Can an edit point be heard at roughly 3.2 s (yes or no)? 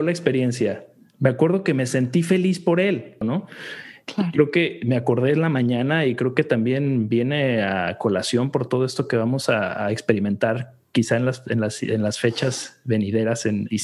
yes